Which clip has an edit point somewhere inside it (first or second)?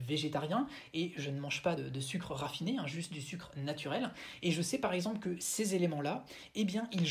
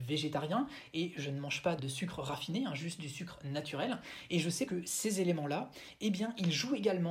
second